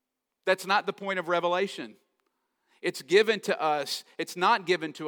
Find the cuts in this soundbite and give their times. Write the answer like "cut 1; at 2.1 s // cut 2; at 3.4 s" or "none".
none